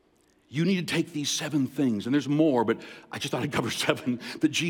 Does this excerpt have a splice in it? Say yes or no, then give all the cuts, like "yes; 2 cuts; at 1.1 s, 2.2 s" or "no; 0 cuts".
no; 0 cuts